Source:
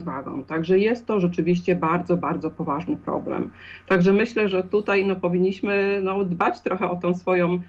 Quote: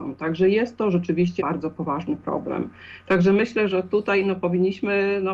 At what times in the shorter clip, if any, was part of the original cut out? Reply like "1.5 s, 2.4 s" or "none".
1.4 s